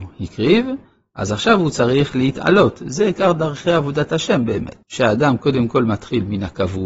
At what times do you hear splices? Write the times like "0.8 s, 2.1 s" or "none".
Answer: 4.8 s